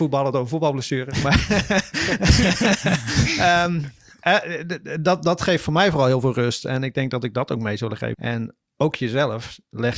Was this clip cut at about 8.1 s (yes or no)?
yes